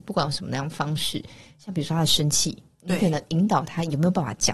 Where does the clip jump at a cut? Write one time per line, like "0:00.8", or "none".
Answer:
none